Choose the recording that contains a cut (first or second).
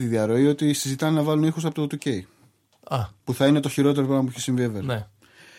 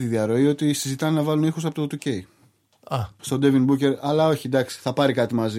second